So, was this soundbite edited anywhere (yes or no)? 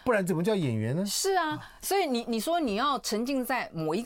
no